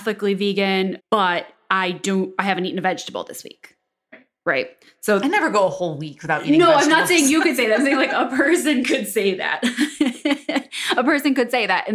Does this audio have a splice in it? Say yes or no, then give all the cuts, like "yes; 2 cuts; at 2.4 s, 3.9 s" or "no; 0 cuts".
yes; 1 cut; at 1.0 s